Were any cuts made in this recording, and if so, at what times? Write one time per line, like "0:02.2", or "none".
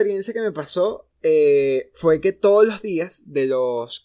none